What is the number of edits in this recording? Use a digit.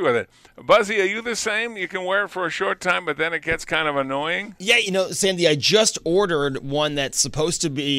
0